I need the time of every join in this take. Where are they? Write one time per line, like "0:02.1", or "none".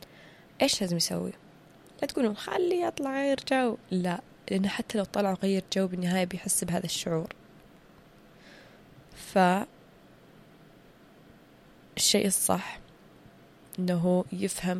none

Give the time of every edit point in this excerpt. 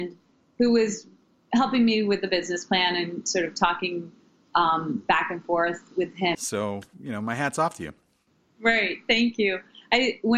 0:06.3

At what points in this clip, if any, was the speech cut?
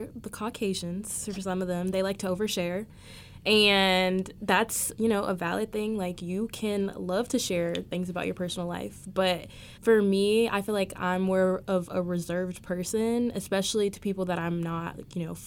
0:09.8

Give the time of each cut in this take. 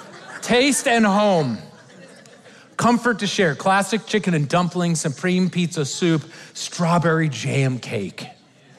none

